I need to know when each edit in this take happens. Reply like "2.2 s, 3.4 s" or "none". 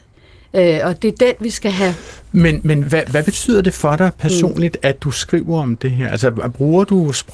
2.8 s